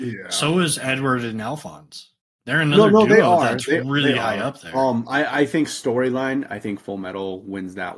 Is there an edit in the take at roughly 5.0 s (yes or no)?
no